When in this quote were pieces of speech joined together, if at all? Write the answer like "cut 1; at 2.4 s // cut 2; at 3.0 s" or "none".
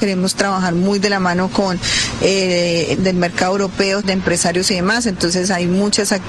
cut 1; at 2.9 s // cut 2; at 4.0 s